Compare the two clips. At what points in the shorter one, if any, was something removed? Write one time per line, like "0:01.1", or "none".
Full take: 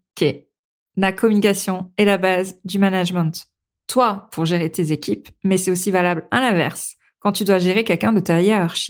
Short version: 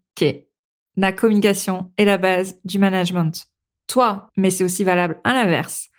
0:04.3